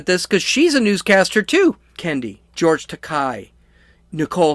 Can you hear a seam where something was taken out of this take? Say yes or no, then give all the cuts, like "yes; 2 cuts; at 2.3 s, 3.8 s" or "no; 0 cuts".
yes; 1 cut; at 2.0 s